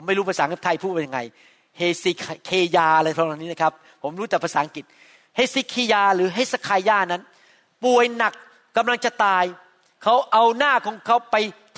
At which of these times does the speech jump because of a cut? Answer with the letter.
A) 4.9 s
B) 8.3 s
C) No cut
C